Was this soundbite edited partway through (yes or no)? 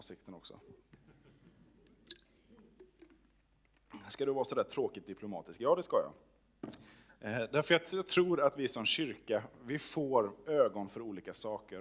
no